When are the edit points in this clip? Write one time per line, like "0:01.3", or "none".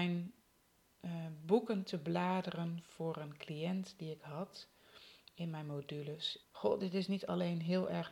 0:06.4